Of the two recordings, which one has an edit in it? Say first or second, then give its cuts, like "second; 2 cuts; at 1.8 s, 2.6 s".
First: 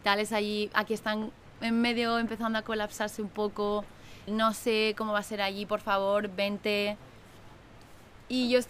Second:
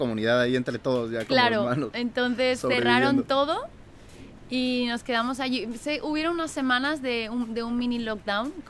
first; 1 cut; at 4.3 s